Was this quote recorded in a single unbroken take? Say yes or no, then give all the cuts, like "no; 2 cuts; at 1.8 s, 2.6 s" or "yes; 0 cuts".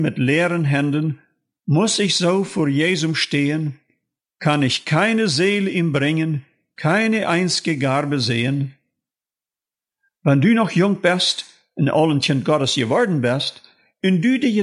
yes; 0 cuts